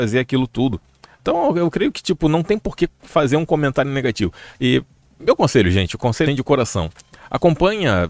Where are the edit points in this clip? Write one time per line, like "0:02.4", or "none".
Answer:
0:04.5
0:06.3